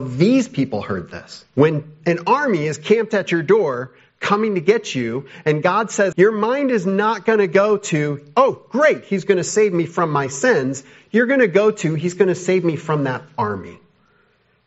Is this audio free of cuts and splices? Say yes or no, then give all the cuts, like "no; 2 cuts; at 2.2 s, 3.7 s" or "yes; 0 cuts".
no; 2 cuts; at 1.5 s, 6.1 s